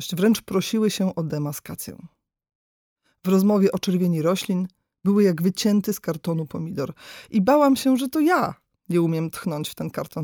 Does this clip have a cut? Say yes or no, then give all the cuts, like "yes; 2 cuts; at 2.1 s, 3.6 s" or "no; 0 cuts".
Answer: no; 0 cuts